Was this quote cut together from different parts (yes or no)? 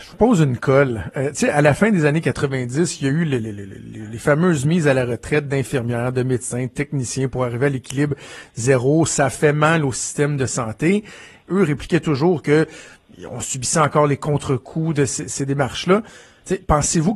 yes